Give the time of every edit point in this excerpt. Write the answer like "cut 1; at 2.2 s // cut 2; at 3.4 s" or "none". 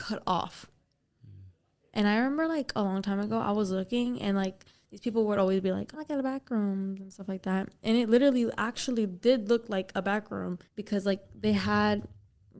cut 1; at 5.9 s // cut 2; at 10.6 s